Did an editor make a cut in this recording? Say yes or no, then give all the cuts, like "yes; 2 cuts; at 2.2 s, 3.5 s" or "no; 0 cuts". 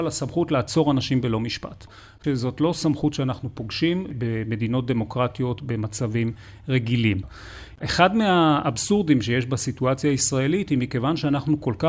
no; 0 cuts